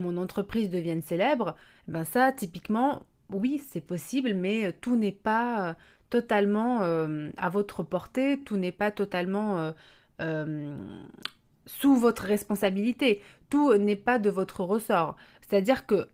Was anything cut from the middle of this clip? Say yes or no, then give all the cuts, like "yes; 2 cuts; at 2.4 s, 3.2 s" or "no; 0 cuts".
no; 0 cuts